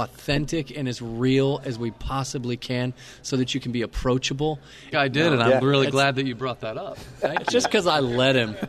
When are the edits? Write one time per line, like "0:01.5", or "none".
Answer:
0:04.9